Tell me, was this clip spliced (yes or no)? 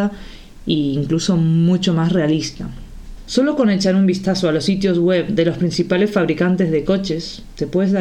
yes